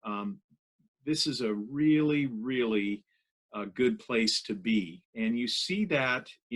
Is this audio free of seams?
no; 1 cut; at 5.0 s

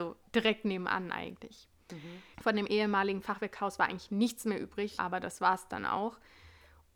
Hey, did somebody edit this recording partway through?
yes; 2 cuts; at 2.3 s, 5.0 s

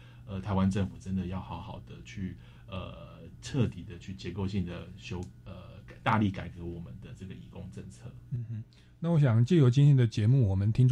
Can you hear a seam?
no; 0 cuts

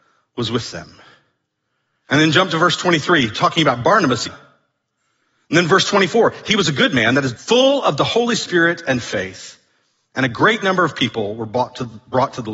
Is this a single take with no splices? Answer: no; 2 cuts; at 4.2 s, 7.3 s

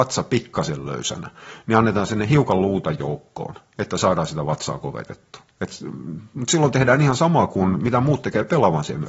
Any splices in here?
no; 0 cuts

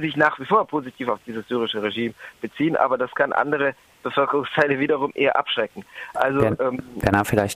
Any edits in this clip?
no; 0 cuts

